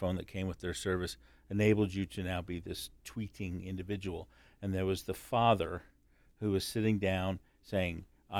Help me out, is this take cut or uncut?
uncut